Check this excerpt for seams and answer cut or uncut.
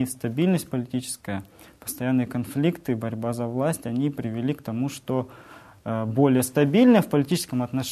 uncut